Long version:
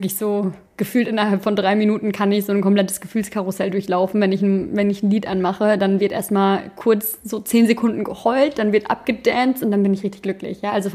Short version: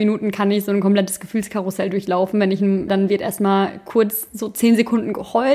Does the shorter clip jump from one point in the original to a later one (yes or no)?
yes